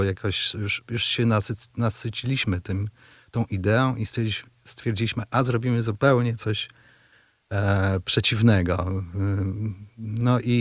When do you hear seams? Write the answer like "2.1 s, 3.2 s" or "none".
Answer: none